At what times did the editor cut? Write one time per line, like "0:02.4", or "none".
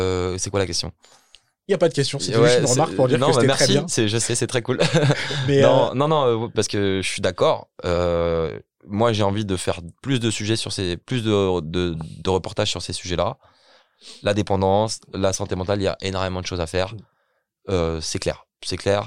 0:06.5